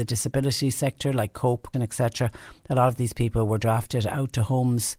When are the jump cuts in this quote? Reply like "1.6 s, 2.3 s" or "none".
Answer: 1.7 s